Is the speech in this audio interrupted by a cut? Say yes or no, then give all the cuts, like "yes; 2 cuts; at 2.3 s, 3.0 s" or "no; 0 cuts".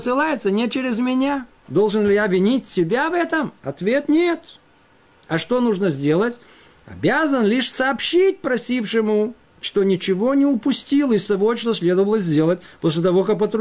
no; 0 cuts